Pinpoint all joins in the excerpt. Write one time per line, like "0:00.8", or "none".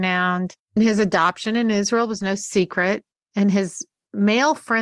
none